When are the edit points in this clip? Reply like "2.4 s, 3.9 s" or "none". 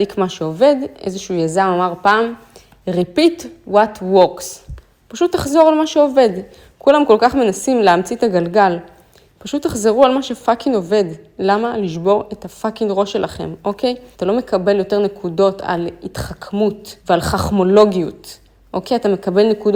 14.1 s, 17.0 s